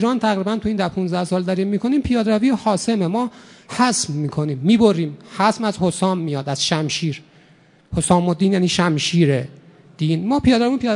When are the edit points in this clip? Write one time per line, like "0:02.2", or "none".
none